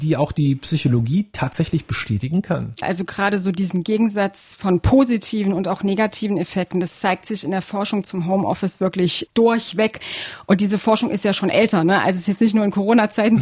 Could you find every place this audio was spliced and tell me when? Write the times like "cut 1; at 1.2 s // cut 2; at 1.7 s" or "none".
cut 1; at 2.8 s